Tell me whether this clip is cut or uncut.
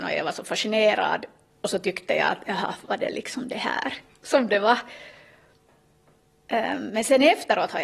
uncut